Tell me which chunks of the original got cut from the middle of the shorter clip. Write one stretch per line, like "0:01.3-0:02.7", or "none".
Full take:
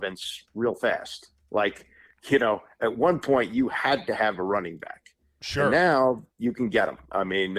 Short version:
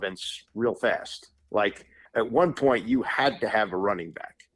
0:02.1-0:02.7